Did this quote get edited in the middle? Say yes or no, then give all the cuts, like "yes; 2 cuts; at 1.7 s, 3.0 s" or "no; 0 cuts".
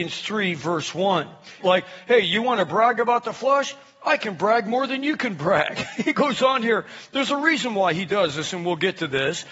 yes; 1 cut; at 1.6 s